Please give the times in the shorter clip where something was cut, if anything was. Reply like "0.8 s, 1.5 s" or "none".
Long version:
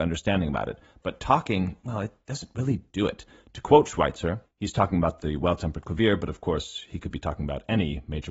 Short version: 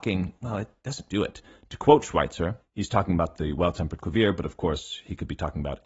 1.1 s